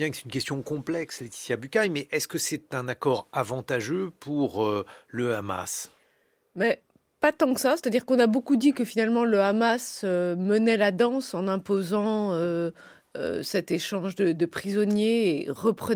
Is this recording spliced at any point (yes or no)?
no